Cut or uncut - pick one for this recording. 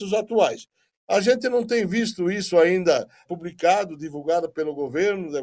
cut